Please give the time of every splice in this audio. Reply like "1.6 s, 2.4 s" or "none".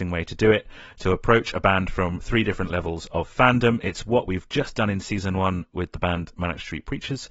none